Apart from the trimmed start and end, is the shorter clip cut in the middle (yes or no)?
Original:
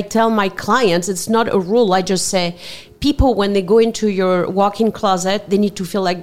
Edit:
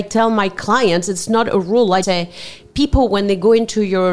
yes